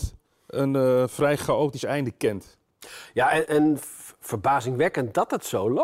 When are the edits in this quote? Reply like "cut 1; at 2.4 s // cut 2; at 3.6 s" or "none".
cut 1; at 3.5 s